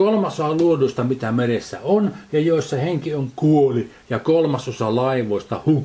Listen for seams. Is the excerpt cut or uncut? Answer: uncut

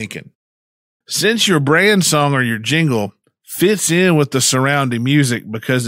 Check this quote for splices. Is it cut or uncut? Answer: cut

